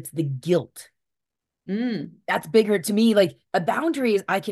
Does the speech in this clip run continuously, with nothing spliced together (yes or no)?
yes